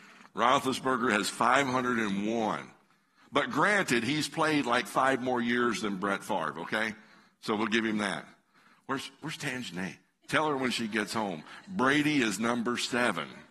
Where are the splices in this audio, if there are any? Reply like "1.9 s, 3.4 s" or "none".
9.2 s